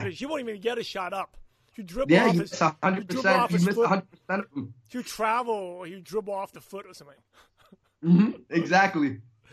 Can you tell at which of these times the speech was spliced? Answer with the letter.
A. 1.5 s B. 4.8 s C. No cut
C